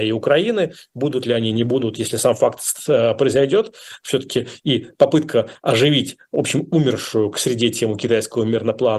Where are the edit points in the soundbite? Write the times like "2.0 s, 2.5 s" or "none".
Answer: none